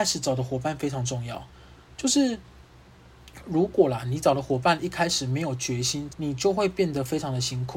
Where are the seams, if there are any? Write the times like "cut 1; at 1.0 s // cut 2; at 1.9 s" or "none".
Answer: cut 1; at 6.1 s